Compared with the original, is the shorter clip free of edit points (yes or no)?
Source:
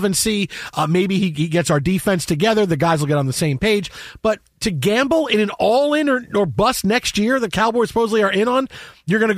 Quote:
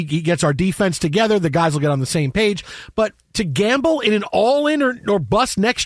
yes